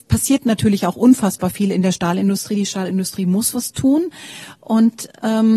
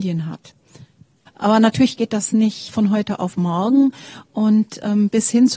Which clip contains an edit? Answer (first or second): second